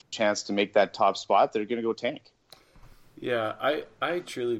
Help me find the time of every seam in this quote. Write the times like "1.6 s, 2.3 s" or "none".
none